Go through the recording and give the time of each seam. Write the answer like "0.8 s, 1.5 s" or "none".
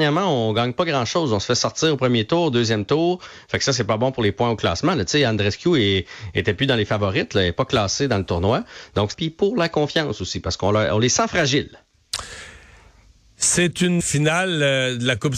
9.1 s, 14.0 s